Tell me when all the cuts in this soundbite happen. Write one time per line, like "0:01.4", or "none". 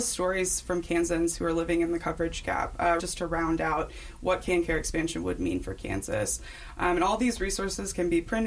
0:03.0

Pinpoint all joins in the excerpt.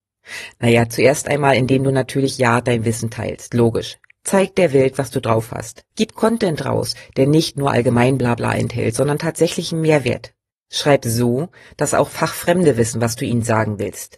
0:05.9
0:10.5

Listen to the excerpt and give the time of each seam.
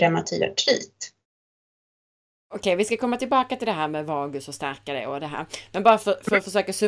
none

